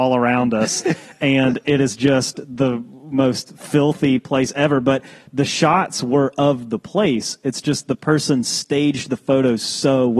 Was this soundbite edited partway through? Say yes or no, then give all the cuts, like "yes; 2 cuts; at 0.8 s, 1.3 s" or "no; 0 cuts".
no; 0 cuts